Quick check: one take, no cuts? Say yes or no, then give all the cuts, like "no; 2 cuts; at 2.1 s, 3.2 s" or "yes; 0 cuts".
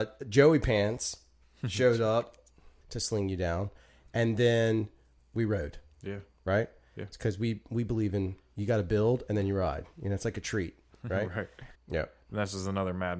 no; 2 cuts; at 2.8 s, 11.7 s